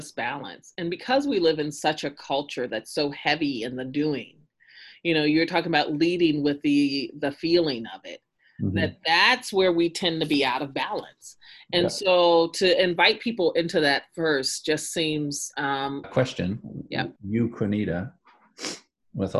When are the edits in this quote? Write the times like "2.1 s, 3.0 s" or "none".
16.0 s, 17.2 s